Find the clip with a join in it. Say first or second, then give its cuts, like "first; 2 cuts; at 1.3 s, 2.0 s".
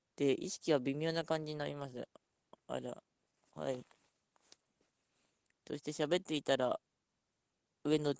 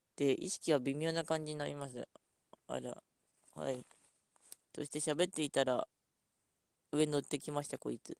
second; 1 cut; at 4.6 s